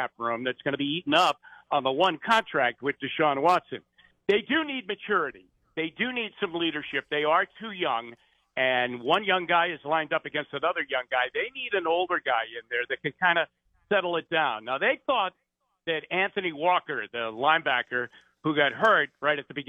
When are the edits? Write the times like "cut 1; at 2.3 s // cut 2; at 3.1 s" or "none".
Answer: none